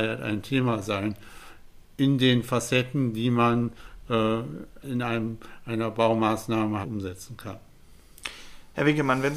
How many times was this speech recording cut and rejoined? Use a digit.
2